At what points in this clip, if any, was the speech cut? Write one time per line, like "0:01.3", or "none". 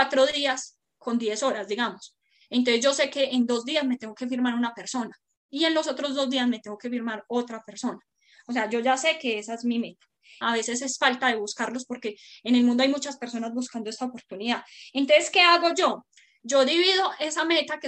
0:10.4